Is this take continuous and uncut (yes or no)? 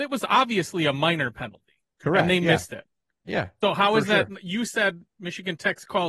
yes